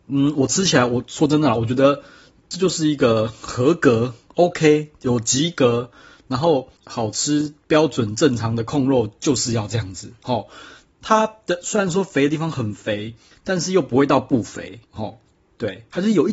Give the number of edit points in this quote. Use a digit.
3